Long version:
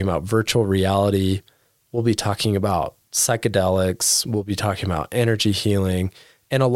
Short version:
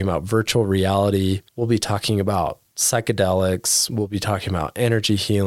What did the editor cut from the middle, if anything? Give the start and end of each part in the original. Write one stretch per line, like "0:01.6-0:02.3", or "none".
0:01.5-0:01.8